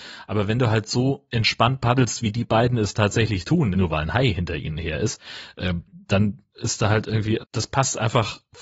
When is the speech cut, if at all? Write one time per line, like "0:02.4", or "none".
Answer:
0:03.7
0:07.4